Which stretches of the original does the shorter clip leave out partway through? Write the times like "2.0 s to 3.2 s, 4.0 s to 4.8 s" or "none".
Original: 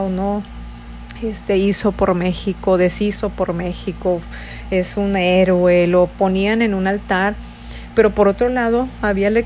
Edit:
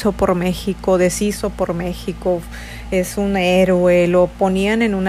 none